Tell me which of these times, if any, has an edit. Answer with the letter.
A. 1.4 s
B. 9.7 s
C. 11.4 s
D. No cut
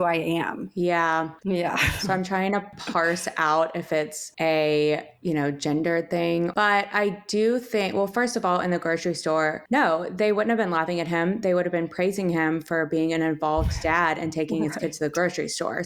A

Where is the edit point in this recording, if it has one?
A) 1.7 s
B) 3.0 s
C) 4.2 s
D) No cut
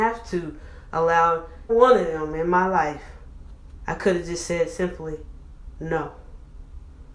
A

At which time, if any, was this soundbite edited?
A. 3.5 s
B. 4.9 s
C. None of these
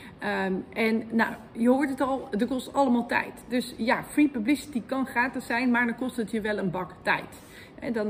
C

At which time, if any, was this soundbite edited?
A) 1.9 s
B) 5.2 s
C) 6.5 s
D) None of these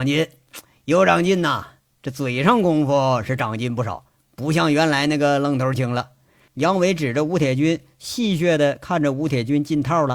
C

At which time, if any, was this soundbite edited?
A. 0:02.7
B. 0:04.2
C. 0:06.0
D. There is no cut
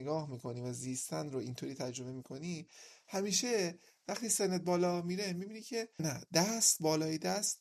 C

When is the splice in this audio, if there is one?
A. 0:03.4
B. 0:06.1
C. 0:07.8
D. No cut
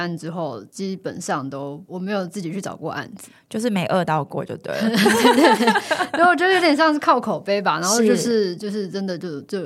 D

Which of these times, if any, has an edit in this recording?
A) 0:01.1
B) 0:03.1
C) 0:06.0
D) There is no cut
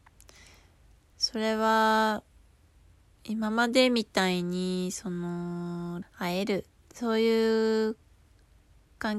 C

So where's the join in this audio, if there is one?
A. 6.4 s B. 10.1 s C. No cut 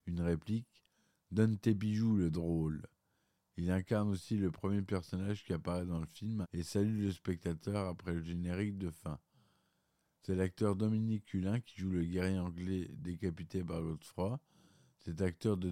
A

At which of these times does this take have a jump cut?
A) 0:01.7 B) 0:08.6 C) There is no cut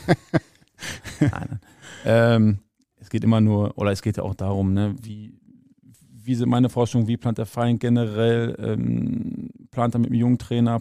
C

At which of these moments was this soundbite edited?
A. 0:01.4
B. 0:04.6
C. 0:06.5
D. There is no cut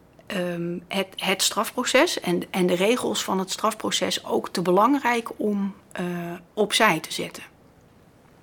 C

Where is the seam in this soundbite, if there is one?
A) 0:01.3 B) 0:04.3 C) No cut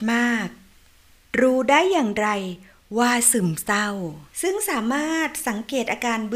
B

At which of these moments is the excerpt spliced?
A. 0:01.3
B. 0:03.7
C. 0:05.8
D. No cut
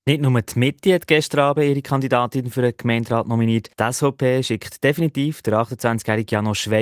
B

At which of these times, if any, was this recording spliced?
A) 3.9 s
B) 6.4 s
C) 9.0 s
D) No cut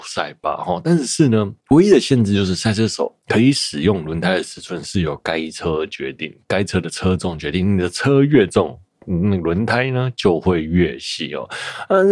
D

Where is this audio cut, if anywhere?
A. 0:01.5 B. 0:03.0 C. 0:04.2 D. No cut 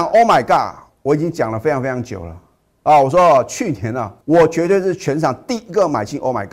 C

